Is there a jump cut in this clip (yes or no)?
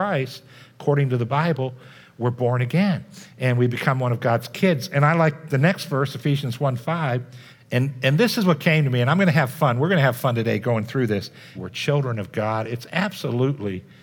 yes